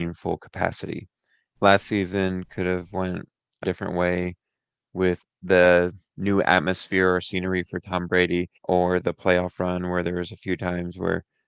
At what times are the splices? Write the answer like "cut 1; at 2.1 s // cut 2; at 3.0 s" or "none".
cut 1; at 1.6 s // cut 2; at 3.6 s // cut 3; at 8.6 s